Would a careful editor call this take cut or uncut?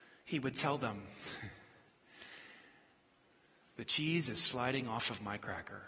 uncut